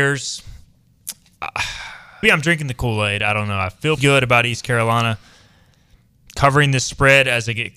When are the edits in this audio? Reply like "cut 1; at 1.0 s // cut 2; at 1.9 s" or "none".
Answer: cut 1; at 2.2 s // cut 2; at 4.0 s